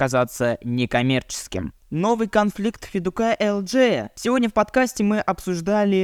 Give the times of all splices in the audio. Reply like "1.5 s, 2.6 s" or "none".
none